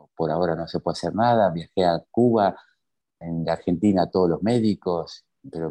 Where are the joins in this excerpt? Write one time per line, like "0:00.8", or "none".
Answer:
0:03.2